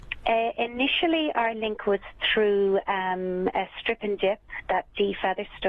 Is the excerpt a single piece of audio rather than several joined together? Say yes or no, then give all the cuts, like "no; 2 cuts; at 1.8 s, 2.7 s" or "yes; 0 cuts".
yes; 0 cuts